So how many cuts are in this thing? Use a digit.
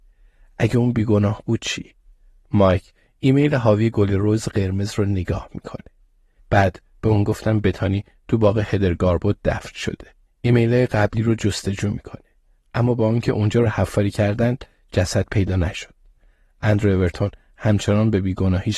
3